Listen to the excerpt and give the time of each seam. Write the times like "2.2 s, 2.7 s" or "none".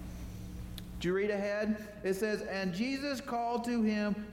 none